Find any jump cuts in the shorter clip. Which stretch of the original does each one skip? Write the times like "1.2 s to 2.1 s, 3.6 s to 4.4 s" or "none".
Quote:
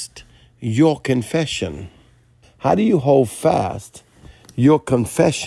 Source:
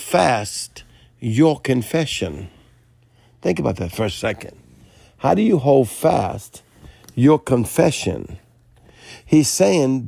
3.0 s to 5.0 s